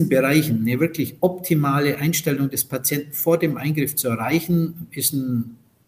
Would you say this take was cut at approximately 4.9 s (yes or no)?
no